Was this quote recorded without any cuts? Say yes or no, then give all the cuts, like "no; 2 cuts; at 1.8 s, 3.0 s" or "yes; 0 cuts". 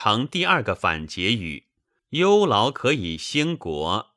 no; 1 cut; at 2.0 s